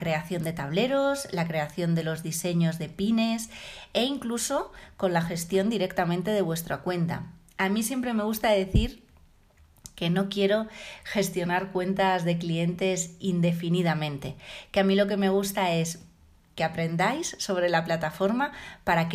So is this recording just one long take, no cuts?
yes; 0 cuts

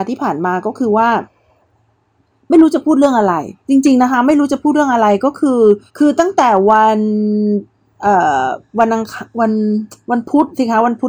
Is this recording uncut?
no; 2 cuts; at 3.6 s, 5.9 s

